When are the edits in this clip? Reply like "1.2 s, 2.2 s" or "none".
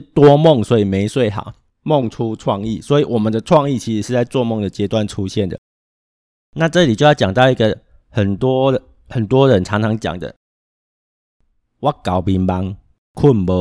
1.7 s